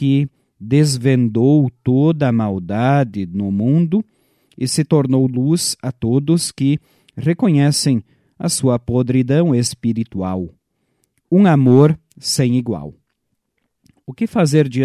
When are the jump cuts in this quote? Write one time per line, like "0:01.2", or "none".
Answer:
none